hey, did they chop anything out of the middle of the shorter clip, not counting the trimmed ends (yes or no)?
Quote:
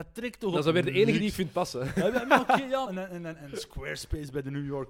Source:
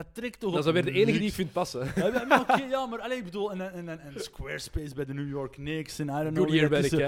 yes